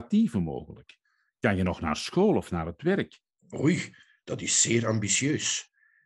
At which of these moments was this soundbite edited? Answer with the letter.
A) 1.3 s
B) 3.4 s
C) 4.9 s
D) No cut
B